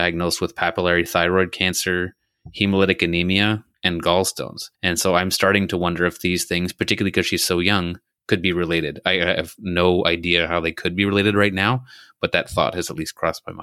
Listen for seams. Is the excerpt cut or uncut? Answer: uncut